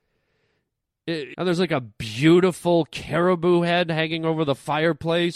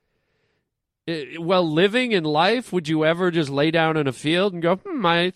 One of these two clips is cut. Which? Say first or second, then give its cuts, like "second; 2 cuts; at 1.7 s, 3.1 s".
first; 1 cut; at 1.3 s